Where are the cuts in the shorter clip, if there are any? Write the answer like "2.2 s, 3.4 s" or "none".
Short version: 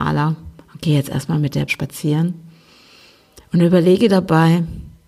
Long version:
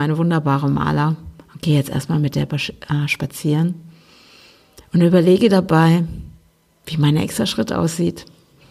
1.7 s